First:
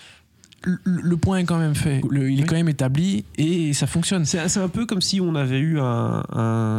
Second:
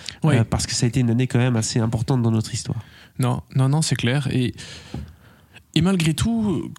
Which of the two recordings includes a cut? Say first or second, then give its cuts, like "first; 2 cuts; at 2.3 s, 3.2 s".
first; 1 cut; at 2.0 s